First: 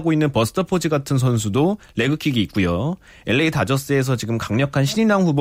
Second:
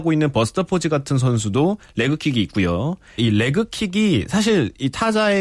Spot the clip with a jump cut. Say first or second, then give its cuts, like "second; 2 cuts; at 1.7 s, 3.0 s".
second; 1 cut; at 3.2 s